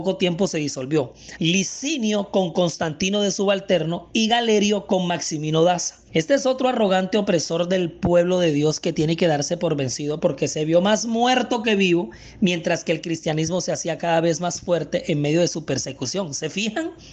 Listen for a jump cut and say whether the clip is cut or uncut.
cut